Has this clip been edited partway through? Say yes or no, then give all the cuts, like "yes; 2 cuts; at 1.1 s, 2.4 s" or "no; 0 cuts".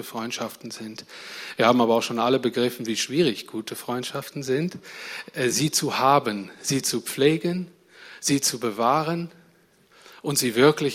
no; 0 cuts